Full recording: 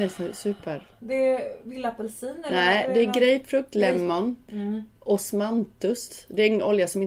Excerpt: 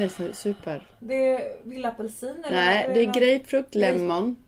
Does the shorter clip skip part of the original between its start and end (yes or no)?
no